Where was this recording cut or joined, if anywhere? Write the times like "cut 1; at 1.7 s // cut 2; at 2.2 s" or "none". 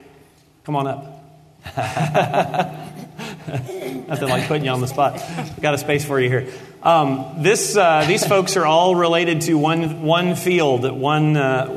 none